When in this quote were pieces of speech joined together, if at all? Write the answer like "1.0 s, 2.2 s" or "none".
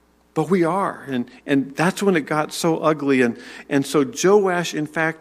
none